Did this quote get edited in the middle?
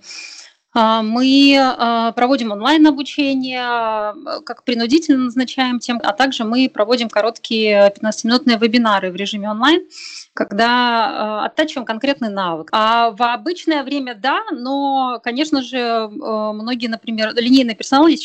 yes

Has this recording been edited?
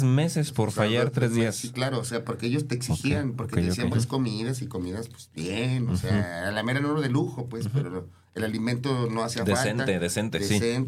yes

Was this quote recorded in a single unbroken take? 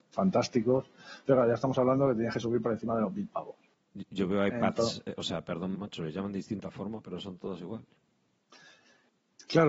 no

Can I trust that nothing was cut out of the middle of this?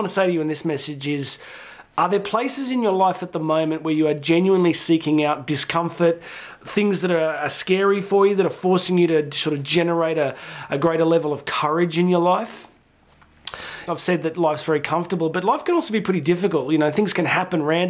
no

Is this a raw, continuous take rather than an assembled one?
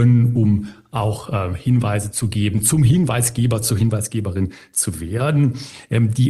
yes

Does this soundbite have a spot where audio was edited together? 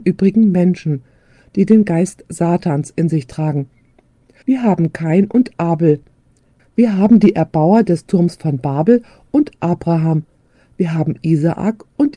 yes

